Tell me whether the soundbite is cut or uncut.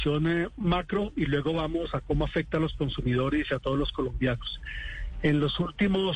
uncut